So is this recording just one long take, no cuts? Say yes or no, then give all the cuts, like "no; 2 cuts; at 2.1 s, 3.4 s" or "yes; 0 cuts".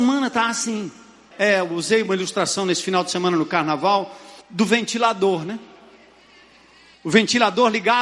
no; 2 cuts; at 1.3 s, 4.4 s